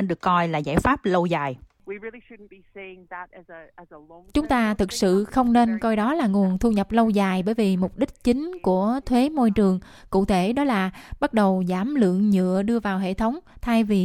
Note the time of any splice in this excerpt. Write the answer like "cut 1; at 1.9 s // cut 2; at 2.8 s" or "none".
none